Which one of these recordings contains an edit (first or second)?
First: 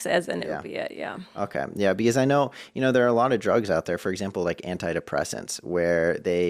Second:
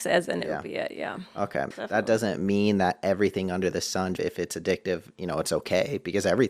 second